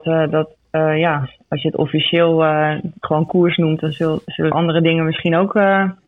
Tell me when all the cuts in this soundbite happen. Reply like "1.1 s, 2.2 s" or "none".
4.5 s